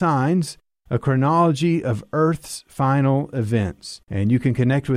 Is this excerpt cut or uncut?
cut